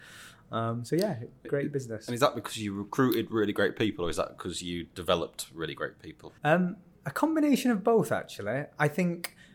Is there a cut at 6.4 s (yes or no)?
yes